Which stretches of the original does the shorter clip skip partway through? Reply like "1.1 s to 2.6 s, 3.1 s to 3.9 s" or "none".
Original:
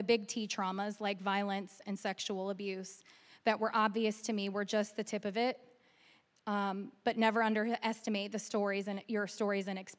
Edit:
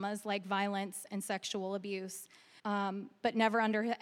3.3 s to 6.4 s